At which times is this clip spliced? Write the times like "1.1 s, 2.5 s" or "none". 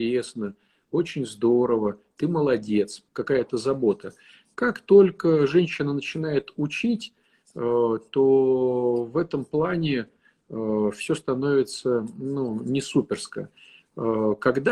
3.1 s

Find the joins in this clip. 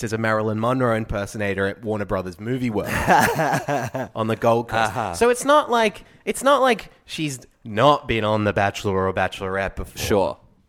none

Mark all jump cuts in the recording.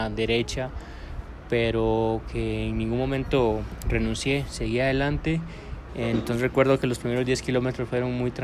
5.9 s

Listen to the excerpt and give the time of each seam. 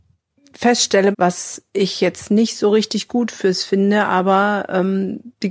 1.1 s

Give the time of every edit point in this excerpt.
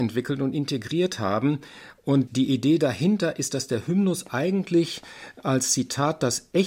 2.3 s

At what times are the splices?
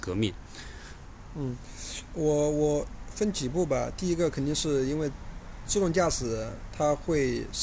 none

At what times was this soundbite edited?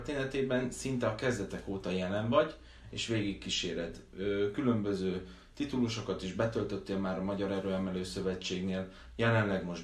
none

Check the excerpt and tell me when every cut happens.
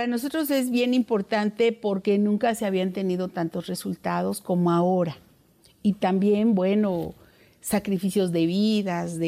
none

